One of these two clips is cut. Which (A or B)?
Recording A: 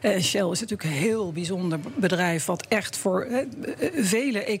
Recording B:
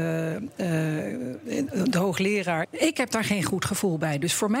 B